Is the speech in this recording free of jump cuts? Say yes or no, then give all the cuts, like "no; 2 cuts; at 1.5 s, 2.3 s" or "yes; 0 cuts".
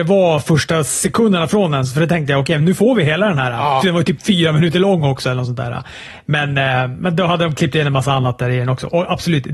yes; 0 cuts